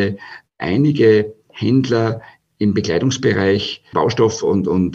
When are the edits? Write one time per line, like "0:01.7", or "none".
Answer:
0:03.9